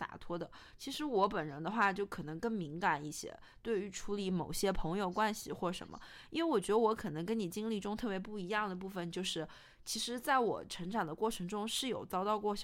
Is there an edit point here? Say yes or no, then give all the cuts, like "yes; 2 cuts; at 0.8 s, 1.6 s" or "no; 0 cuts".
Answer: no; 0 cuts